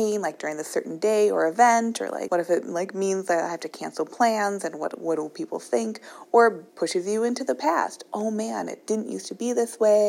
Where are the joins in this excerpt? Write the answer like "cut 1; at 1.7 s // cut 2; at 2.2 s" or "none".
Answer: cut 1; at 2.3 s // cut 2; at 6.7 s